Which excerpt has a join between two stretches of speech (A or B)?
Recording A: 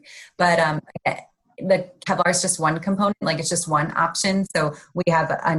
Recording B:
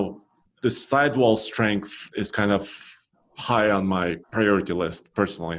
B